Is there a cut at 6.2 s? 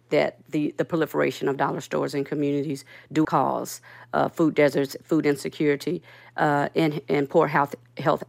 no; 1 cut; at 3.2 s

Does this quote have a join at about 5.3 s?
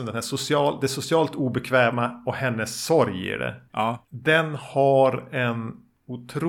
no; 1 cut; at 3.7 s

